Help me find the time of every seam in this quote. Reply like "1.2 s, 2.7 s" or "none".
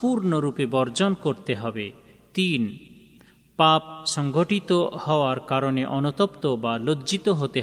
none